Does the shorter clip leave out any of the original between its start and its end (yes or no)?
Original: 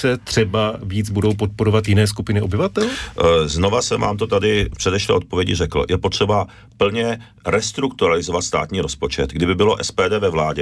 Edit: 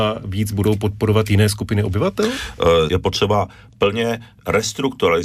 yes